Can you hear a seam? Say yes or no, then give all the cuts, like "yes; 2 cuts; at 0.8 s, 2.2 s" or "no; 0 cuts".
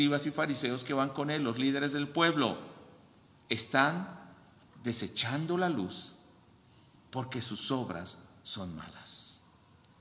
no; 0 cuts